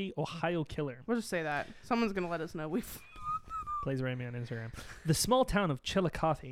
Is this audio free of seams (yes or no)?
yes